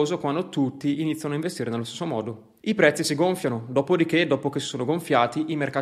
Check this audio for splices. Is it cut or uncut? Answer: uncut